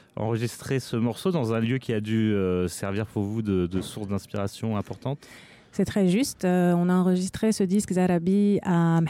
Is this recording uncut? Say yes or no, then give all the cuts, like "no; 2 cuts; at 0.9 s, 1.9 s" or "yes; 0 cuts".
yes; 0 cuts